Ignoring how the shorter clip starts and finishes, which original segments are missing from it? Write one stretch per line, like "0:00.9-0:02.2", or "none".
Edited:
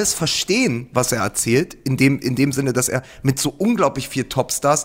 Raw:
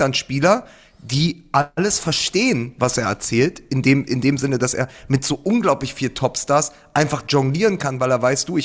none